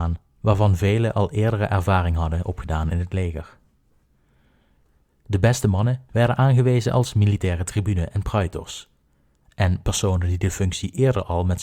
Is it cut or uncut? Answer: cut